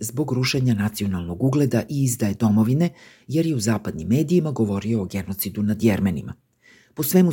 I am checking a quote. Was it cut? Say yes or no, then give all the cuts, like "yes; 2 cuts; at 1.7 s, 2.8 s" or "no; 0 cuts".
no; 0 cuts